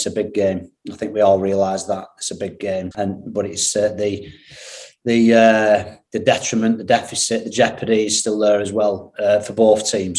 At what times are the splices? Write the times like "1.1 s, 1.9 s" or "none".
2.9 s